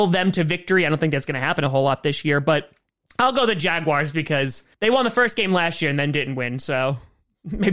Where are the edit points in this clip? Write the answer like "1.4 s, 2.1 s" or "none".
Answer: 4.7 s